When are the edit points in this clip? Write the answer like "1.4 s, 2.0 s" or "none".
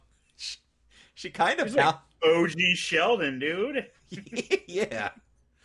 none